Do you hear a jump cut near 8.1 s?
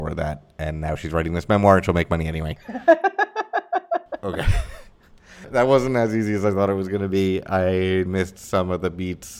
yes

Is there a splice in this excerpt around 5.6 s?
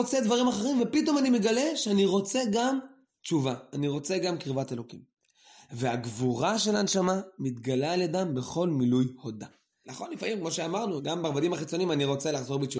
no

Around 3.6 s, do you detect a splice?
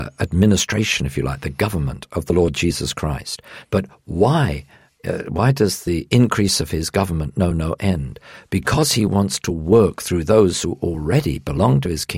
yes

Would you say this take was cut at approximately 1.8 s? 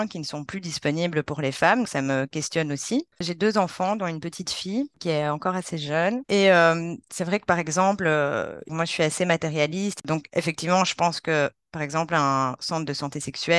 yes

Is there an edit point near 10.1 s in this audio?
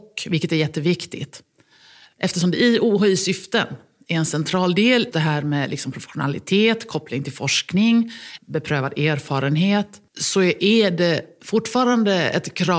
yes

